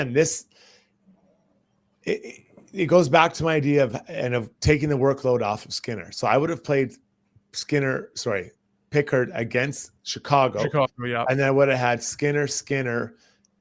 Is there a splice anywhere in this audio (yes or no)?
no